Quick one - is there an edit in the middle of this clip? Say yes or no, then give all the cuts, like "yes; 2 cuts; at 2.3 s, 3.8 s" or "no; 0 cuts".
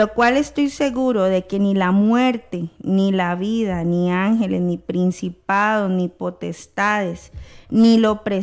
no; 0 cuts